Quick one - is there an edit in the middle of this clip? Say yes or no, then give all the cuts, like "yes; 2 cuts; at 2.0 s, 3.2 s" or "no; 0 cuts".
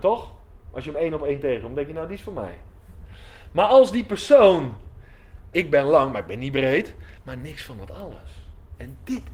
yes; 2 cuts; at 5.5 s, 7.2 s